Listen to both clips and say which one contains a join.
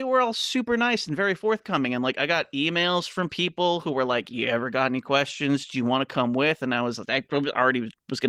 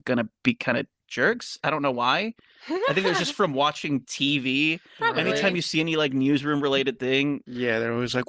first; 1 cut; at 5.7 s

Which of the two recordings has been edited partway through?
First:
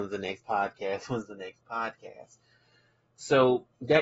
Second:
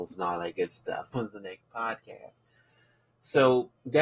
second; 1 cut; at 1.1 s

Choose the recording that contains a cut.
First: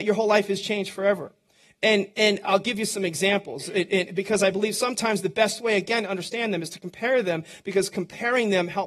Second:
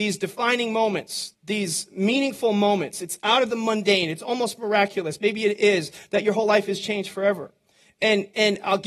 second; 1 cut; at 1.3 s

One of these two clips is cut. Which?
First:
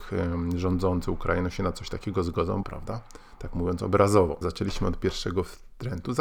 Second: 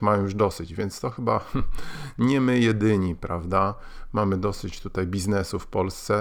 first; 2 cuts; at 2.6 s, 4.4 s

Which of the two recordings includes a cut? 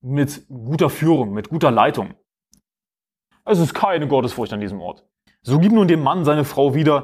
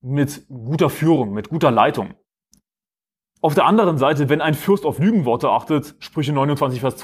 first; 2 cuts; at 3.3 s, 5.3 s

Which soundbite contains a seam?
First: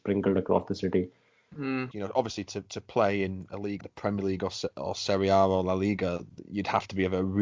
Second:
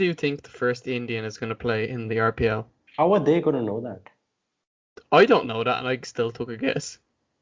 first; 2 cuts; at 1.9 s, 3.8 s

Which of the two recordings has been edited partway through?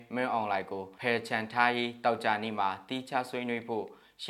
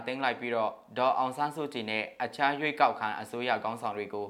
first; 1 cut; at 1.0 s

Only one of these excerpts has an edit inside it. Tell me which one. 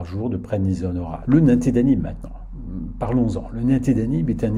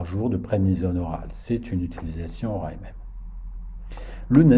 first; 1 cut; at 1.2 s

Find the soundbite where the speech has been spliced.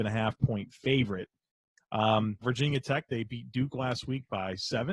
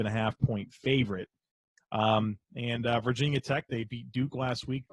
first; 1 cut; at 2.4 s

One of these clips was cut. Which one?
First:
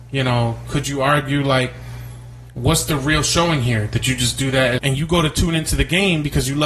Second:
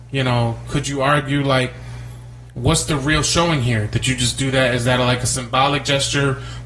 first; 1 cut; at 4.8 s

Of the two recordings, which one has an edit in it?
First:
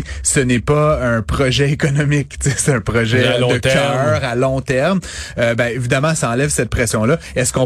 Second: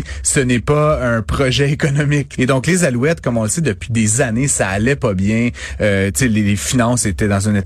second; 1 cut; at 2.4 s

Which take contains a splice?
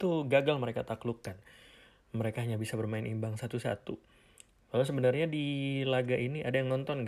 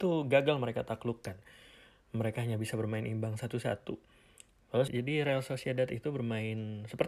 second; 1 cut; at 4.9 s

